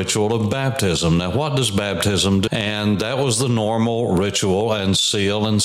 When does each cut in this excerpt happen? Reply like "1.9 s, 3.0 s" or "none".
2.5 s